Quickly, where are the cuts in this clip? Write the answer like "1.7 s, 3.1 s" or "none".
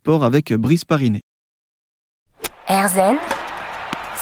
none